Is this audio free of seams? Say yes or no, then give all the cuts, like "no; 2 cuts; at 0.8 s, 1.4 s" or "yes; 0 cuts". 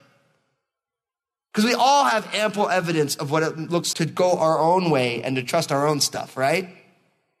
no; 1 cut; at 3.9 s